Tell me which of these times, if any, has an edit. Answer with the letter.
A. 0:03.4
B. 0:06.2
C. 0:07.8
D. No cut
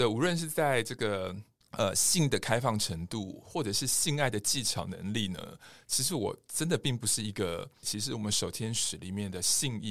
C